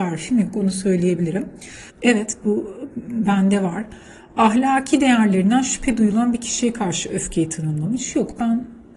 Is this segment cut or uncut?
cut